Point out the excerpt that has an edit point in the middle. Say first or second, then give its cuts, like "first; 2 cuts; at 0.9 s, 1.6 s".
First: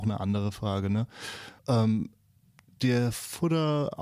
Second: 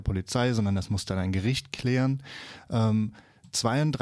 first; 1 cut; at 1.6 s